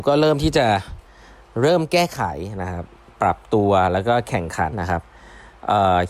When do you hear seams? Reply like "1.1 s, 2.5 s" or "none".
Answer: 4.7 s